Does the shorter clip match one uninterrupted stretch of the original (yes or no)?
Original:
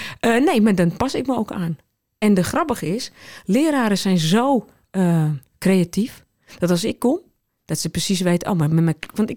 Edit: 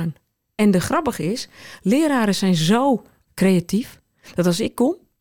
no